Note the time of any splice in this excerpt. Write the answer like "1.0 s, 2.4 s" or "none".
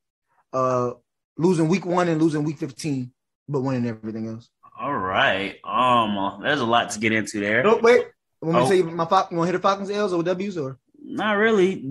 10.9 s